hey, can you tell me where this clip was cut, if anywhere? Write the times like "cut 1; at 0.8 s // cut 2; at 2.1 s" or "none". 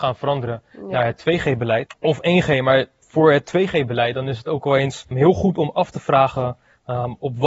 cut 1; at 1.9 s // cut 2; at 5.1 s